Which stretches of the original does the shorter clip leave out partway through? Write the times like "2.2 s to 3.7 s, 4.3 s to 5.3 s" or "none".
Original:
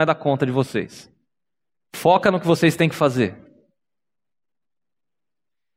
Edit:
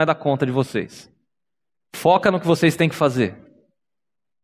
none